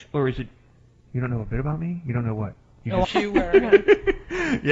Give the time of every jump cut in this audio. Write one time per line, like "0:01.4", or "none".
0:01.1
0:03.0